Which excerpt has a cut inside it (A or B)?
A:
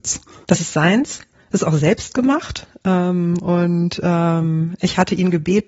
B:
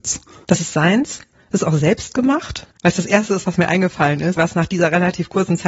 B